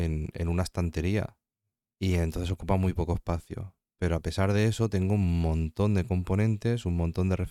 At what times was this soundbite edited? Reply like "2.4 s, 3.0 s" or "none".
1.9 s